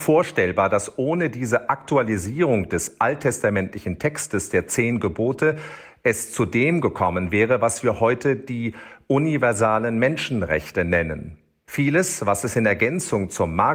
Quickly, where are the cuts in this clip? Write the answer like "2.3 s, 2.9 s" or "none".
11.6 s